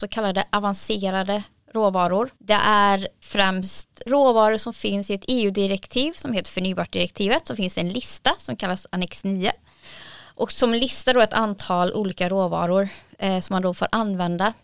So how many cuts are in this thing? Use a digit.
1